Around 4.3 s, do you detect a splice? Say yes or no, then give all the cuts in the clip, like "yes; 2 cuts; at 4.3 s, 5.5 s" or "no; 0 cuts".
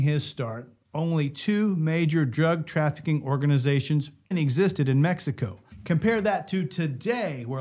yes; 1 cut; at 4.3 s